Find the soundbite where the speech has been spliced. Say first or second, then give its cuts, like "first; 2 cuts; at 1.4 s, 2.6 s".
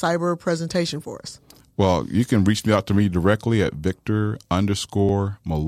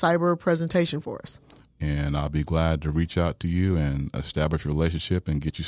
second; 1 cut; at 1.7 s